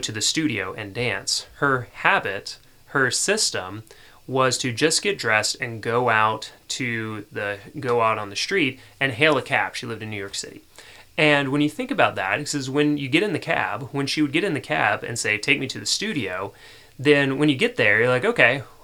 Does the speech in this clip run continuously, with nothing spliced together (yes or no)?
yes